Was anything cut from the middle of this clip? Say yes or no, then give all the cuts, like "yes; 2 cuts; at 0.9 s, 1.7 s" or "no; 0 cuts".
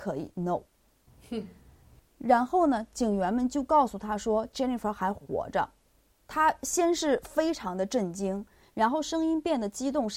no; 0 cuts